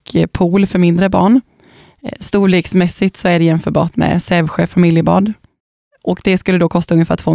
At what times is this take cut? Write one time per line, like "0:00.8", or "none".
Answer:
none